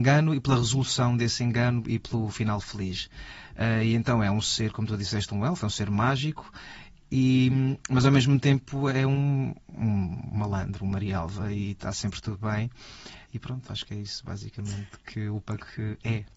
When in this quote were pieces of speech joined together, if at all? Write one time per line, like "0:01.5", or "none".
none

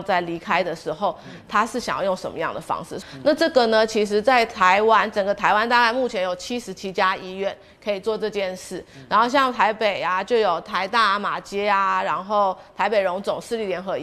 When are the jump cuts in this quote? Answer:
0:03.0

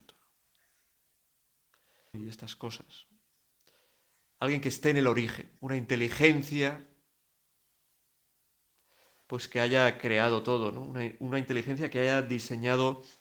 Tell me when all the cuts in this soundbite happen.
0:02.1
0:05.6

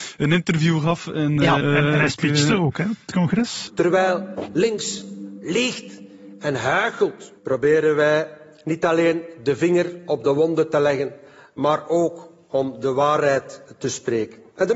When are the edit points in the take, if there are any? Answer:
0:01.6

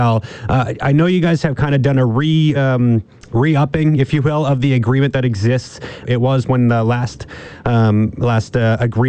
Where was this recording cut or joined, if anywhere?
0:02.5
0:06.0

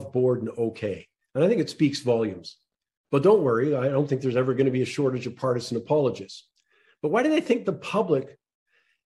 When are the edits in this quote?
none

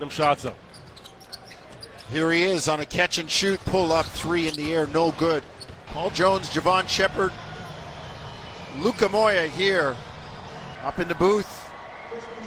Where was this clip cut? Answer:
0:03.6
0:05.9
0:10.8

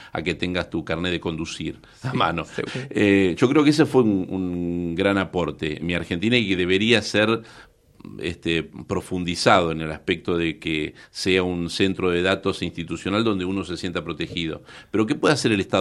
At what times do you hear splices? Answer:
0:02.7
0:04.3
0:05.8

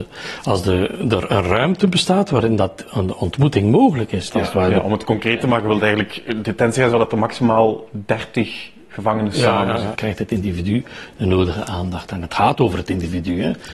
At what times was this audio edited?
0:04.3
0:10.0

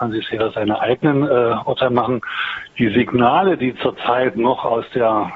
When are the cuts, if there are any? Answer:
none

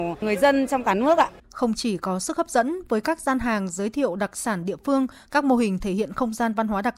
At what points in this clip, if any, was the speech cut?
0:01.4

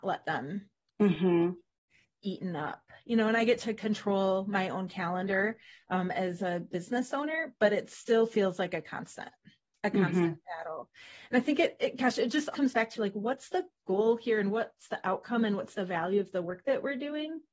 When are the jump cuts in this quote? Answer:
0:12.5

